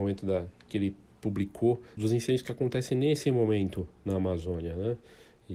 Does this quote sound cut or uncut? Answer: cut